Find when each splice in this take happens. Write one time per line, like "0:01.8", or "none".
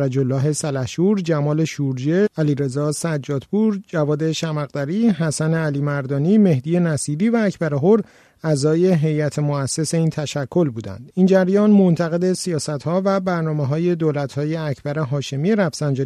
none